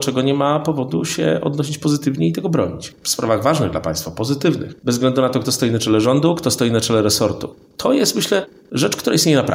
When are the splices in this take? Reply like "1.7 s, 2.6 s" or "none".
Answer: 4.8 s